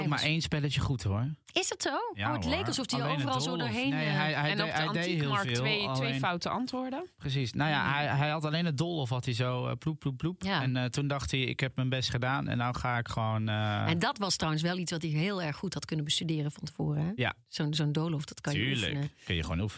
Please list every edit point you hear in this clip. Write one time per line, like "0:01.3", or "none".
none

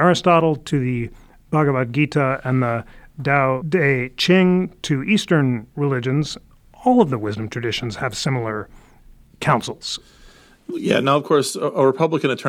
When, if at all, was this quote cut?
none

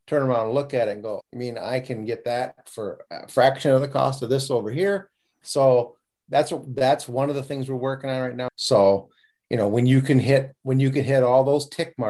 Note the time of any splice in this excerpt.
0:01.2
0:06.1
0:08.5

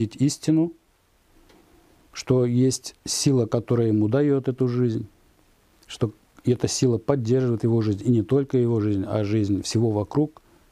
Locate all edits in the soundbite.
none

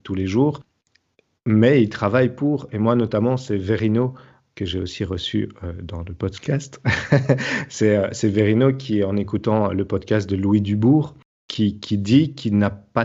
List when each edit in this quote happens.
none

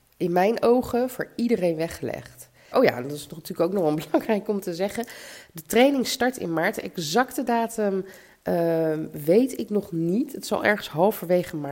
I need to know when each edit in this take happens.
0:02.7

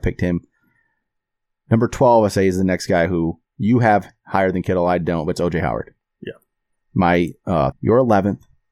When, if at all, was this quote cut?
0:07.7

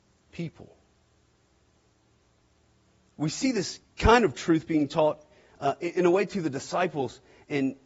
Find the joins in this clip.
none

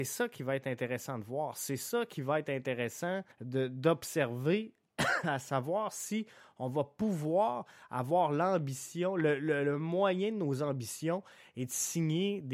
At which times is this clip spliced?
0:03.3

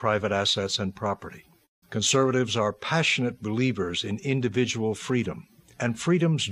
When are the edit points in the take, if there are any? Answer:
0:01.8

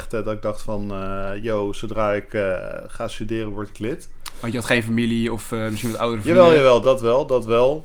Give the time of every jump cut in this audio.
0:06.8

